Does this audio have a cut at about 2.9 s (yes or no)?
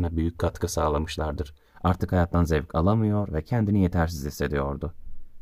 no